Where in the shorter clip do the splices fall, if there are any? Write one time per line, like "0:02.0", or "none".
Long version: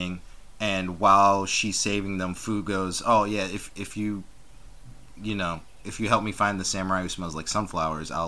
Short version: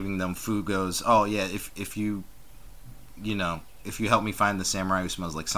none

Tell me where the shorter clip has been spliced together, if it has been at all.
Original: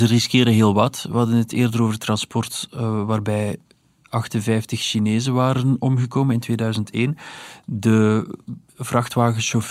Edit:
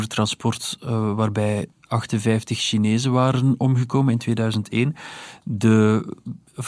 0:01.7

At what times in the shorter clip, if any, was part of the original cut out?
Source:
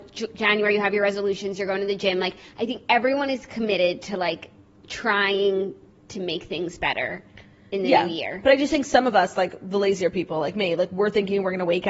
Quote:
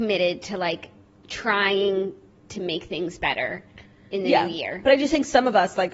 none

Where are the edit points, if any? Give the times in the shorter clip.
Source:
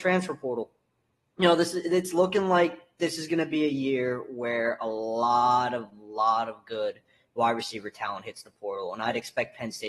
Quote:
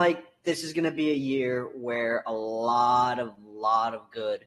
none

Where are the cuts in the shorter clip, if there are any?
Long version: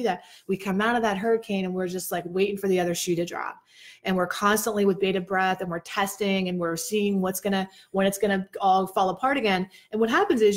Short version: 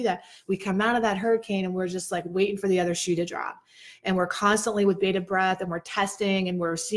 none

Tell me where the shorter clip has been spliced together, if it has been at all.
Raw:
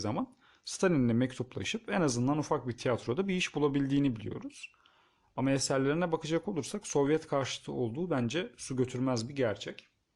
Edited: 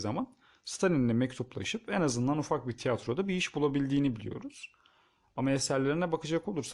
none

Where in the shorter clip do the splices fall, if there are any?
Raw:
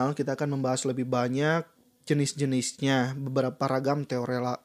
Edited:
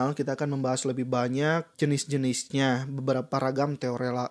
0:01.7

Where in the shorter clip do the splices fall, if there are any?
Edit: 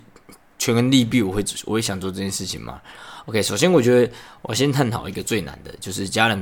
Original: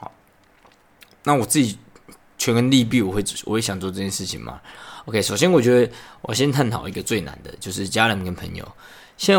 none

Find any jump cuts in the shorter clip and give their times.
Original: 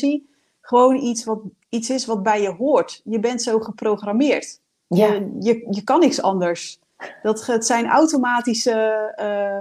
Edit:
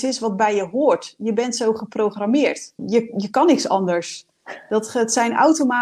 0:02.8

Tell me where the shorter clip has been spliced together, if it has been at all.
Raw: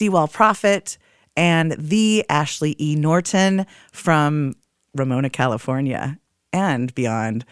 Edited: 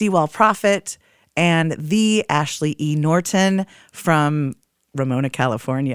none

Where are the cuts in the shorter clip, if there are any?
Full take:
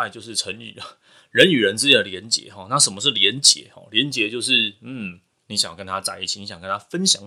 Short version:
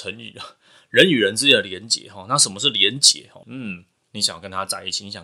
0:03.4

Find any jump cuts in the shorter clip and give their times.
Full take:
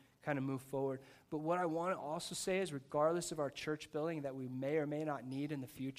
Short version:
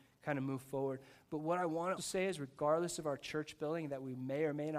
0:02.0

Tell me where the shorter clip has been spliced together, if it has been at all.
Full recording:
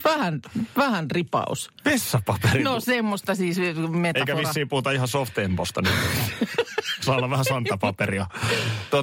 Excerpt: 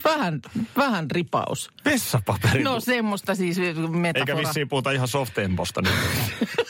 none

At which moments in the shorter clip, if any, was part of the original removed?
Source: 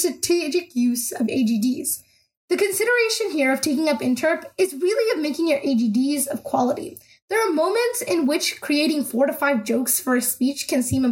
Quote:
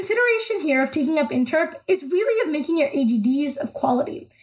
none

